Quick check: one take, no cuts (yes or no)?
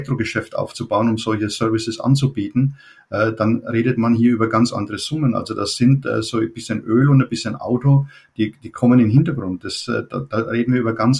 yes